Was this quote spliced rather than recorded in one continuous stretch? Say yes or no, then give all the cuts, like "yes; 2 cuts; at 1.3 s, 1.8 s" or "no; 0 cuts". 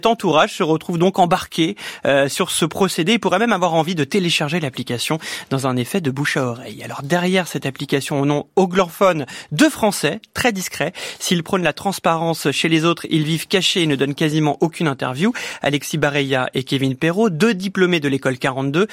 no; 0 cuts